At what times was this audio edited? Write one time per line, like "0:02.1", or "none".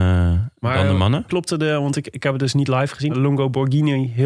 0:03.1